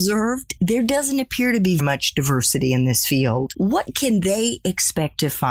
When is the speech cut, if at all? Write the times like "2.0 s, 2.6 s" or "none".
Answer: 1.8 s